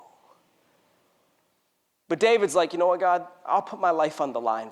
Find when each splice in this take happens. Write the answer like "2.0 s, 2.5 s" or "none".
none